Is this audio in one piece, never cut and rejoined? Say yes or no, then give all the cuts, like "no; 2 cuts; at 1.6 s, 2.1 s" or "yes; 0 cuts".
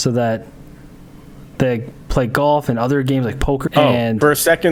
no; 1 cut; at 3.7 s